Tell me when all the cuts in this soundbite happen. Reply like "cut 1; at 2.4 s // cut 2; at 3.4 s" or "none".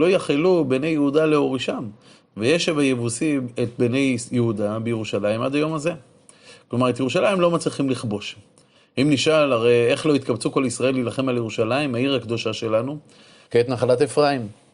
cut 1; at 13.5 s